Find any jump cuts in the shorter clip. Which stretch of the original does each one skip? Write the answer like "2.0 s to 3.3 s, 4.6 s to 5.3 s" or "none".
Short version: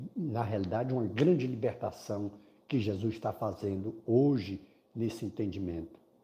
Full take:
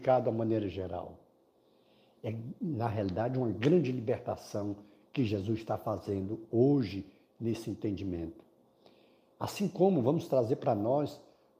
none